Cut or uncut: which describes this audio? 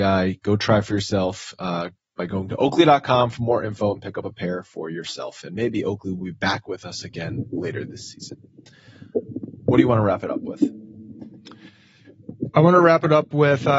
uncut